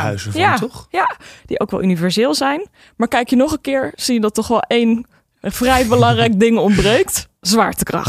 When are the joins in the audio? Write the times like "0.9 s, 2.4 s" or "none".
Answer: 1.4 s